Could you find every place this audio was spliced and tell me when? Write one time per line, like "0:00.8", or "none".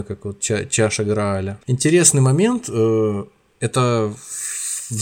0:01.6